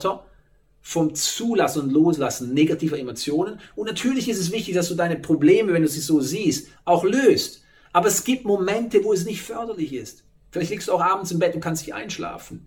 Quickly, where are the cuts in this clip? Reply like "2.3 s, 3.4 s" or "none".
none